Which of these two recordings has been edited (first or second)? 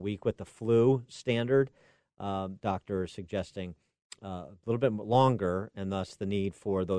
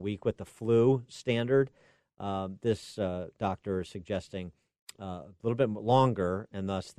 first